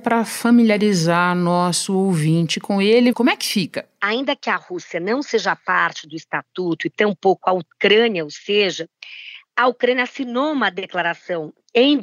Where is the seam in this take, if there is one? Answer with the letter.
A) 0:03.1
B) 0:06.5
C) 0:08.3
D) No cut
A